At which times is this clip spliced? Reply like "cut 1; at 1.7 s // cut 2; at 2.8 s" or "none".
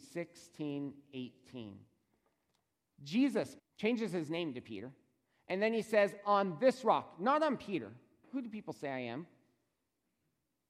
cut 1; at 3.6 s // cut 2; at 8.2 s